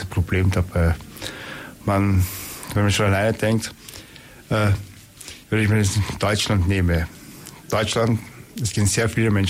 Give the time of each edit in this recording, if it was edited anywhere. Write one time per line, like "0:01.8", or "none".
0:05.4